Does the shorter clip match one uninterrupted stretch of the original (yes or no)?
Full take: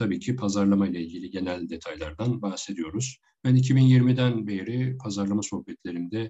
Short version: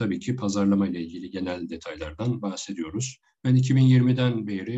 yes